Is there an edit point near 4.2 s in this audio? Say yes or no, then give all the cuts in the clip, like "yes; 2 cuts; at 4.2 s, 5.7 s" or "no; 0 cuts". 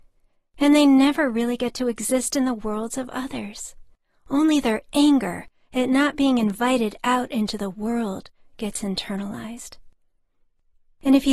no; 0 cuts